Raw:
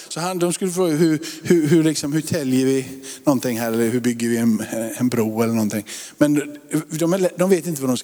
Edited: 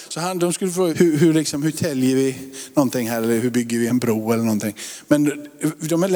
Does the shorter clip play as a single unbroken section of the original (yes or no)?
no